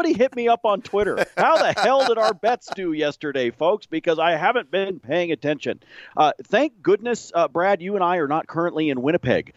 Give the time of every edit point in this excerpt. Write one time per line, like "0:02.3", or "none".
0:06.1